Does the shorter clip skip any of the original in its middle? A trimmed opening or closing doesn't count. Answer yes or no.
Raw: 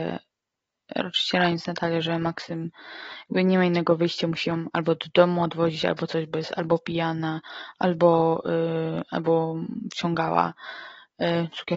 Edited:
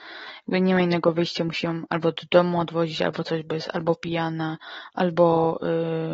no